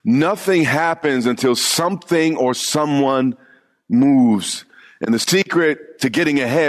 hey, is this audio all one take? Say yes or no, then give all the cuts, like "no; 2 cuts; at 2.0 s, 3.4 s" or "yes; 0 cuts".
yes; 0 cuts